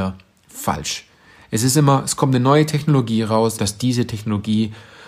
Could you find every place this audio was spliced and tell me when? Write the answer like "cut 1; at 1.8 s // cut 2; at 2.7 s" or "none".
cut 1; at 3.6 s